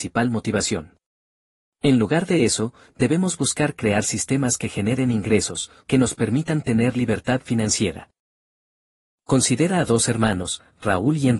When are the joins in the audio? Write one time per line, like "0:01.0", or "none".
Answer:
0:05.8

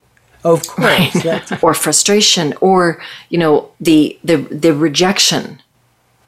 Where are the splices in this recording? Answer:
0:01.6

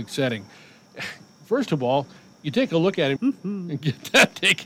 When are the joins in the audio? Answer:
0:03.2

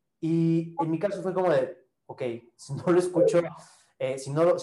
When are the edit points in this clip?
none

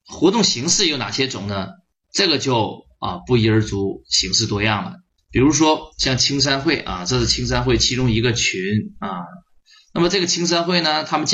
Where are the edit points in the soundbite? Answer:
0:05.2

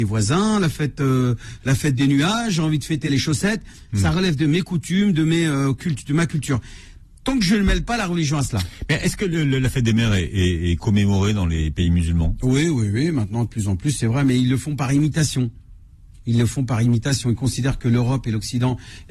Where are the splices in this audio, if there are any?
0:03.9

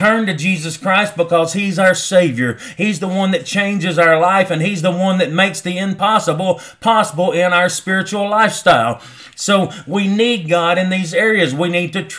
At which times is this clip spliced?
none

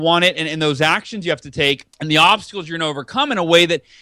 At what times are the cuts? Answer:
0:01.9

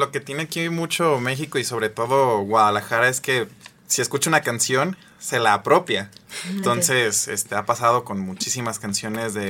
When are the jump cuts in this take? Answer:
0:06.6

